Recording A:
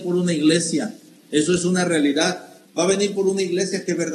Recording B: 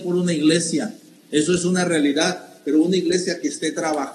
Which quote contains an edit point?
A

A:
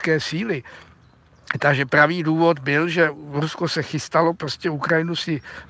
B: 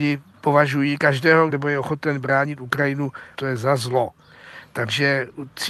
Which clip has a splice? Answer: B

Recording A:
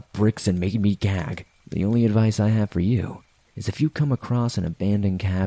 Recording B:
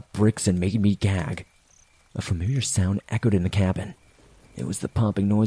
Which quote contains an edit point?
A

